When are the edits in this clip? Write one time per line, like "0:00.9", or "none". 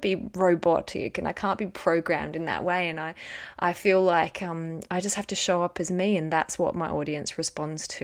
none